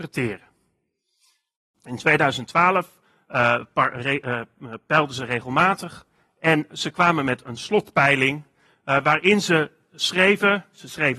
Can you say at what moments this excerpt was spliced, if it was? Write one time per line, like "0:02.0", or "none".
0:01.7